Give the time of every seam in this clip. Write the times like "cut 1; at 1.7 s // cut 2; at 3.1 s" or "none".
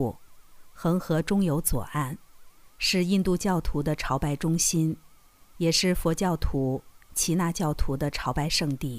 none